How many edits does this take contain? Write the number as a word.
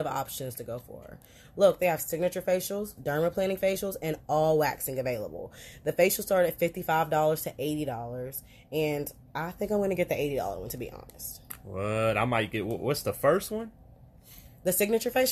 one